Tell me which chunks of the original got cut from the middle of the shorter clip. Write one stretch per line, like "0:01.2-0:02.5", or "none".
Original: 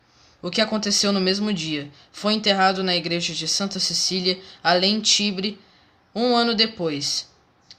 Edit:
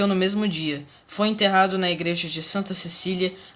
none